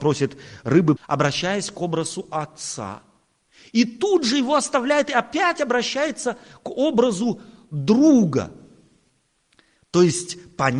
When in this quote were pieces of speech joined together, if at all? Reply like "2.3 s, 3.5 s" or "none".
1.0 s

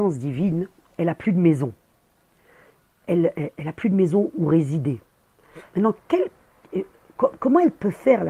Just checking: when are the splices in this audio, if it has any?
3.3 s, 5.7 s

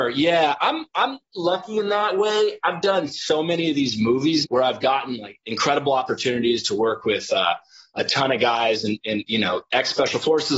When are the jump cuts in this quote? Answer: 4.4 s

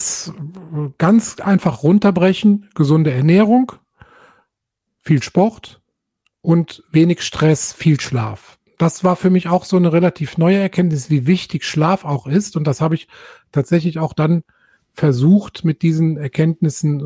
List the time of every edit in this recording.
none

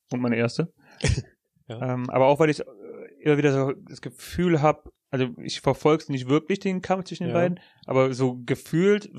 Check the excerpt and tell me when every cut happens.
5.0 s

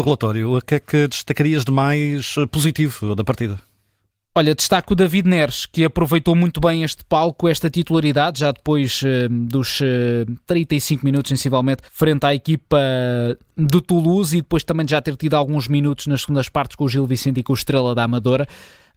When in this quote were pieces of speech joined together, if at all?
11.9 s

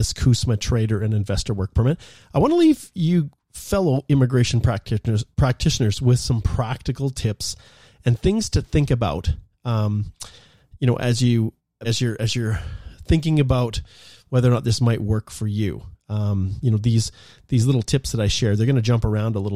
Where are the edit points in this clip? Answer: 11.8 s

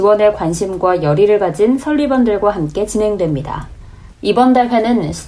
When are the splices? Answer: 4.1 s

